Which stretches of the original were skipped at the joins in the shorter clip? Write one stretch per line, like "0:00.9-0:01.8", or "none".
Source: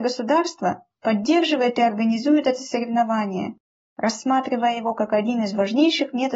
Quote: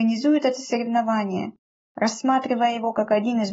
none